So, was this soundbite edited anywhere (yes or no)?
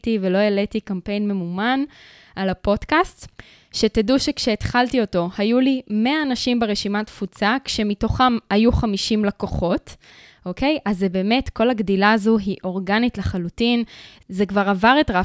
no